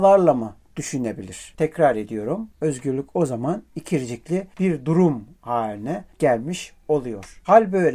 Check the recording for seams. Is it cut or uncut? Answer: cut